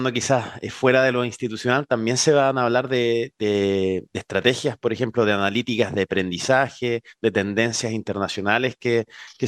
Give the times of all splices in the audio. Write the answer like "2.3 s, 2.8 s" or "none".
none

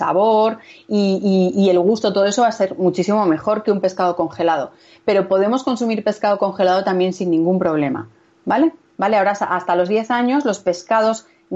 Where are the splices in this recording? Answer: 8.9 s

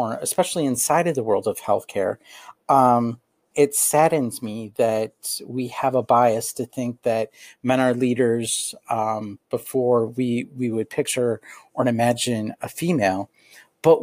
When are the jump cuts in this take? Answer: 3.5 s

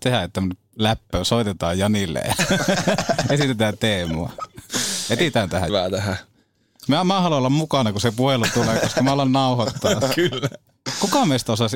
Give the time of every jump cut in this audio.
5.7 s, 6.9 s

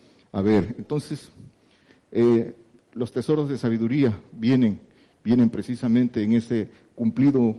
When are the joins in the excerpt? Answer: none

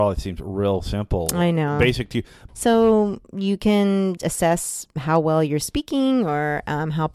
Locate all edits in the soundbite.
2.5 s, 4.2 s

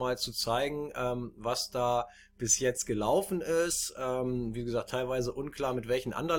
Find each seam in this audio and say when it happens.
none

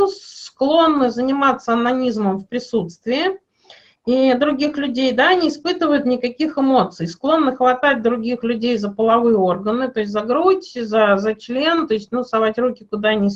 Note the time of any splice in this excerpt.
none

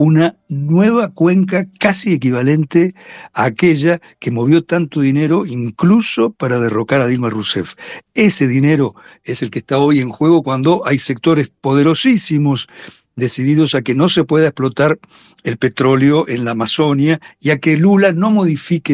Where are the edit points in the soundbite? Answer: none

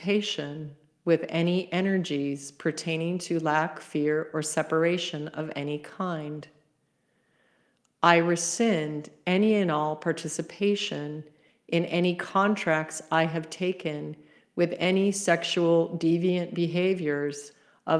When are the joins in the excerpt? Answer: none

